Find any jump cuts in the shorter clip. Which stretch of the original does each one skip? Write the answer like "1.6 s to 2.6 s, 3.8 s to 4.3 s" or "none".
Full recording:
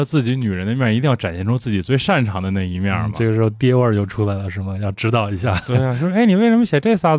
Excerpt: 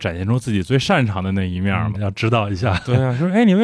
3.1 s to 4.8 s

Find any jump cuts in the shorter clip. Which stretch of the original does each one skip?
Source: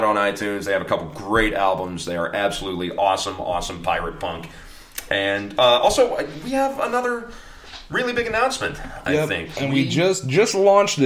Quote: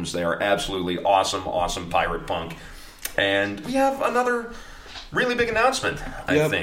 5.6 s to 6.4 s

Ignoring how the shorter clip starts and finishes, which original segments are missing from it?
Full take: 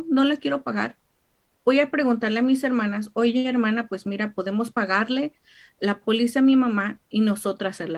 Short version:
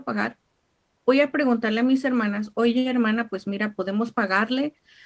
none

